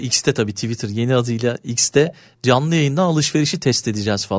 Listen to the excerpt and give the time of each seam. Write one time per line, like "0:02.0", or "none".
none